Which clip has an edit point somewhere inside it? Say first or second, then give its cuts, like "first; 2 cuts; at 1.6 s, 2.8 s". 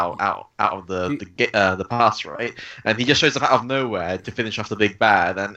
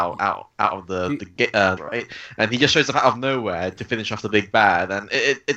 second; 1 cut; at 1.8 s